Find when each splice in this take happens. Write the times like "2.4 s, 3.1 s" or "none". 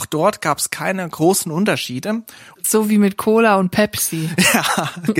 2.5 s

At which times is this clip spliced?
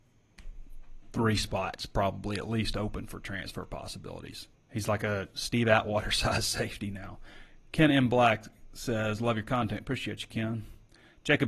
4.5 s

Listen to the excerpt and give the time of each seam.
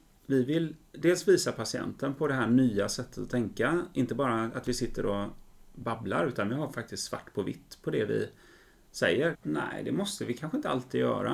9.3 s

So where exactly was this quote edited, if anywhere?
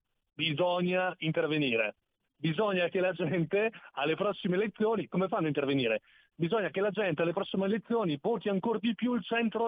5.1 s

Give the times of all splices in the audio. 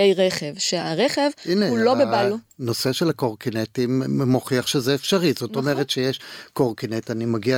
none

